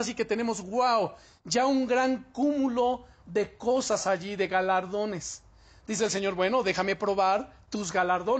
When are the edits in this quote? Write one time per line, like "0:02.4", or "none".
none